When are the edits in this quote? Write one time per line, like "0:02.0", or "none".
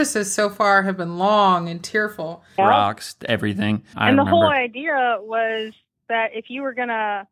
0:02.6
0:03.9